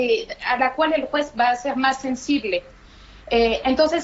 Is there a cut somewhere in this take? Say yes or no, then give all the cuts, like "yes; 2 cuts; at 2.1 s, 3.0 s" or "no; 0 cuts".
no; 0 cuts